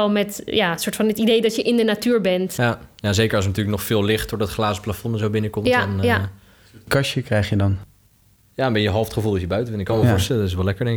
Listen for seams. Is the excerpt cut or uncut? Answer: uncut